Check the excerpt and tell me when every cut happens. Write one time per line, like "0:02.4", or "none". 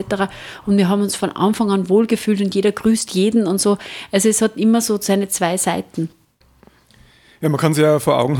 none